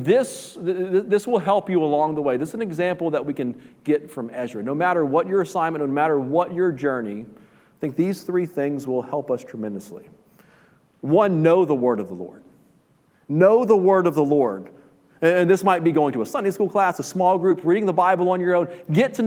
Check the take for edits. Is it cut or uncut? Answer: uncut